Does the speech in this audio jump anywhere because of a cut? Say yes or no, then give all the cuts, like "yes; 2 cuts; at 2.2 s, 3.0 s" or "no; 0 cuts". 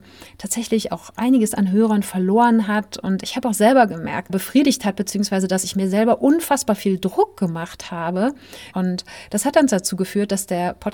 yes; 2 cuts; at 4.3 s, 8.7 s